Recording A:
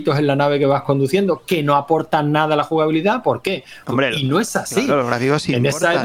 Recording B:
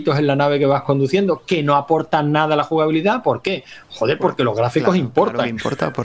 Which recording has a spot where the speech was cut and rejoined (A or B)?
A